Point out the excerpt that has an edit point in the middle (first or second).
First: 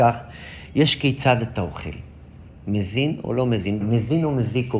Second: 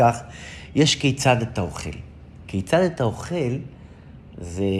first